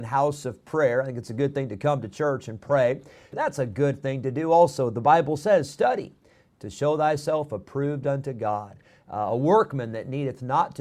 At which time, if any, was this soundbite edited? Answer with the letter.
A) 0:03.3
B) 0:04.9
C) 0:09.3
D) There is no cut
A